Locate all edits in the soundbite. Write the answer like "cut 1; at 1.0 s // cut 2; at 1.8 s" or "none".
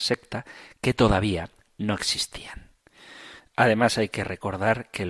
cut 1; at 3.4 s